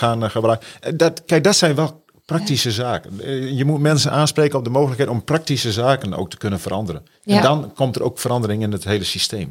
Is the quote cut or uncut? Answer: uncut